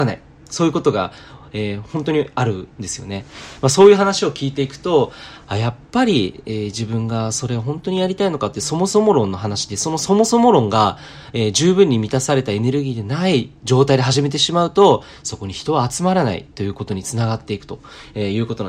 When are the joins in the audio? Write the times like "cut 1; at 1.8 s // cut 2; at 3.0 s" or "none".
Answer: none